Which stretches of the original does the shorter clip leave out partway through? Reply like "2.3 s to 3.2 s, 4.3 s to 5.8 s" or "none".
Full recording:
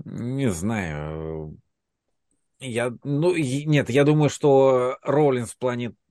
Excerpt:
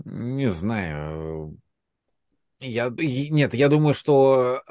3.0 s to 3.3 s

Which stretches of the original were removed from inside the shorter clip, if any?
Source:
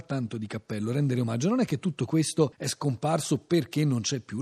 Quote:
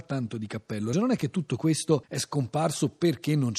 0.9 s to 1.4 s

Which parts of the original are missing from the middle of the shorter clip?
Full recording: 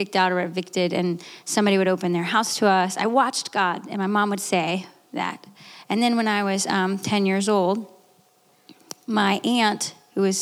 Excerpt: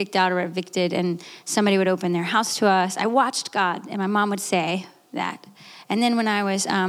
none

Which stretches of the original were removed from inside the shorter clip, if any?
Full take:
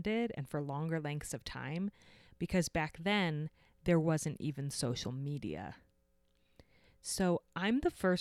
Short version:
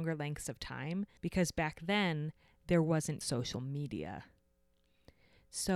2.0 s to 2.3 s, 4.4 s to 4.7 s

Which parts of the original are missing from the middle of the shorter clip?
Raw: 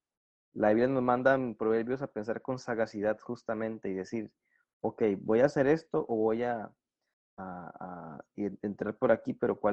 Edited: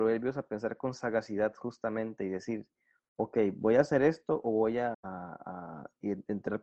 6.6 s to 7.3 s

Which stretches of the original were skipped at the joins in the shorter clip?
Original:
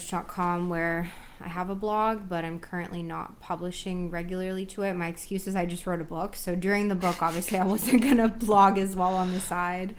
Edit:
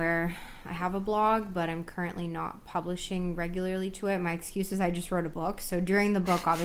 none

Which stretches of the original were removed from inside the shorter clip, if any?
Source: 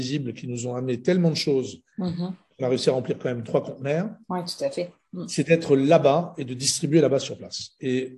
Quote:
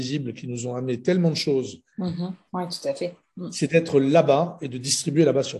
2.5 s to 4.2 s

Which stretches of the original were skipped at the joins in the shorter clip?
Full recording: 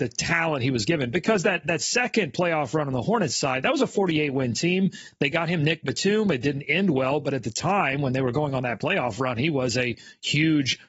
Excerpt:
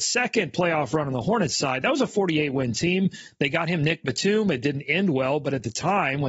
none

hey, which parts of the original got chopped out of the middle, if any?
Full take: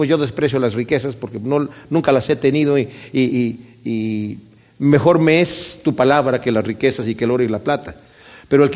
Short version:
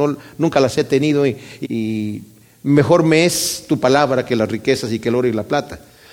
3.1 s to 3.8 s

